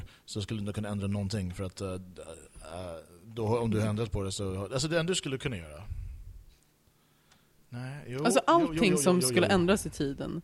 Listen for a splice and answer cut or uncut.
uncut